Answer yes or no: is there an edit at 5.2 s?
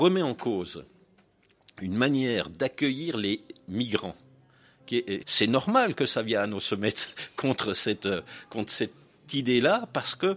yes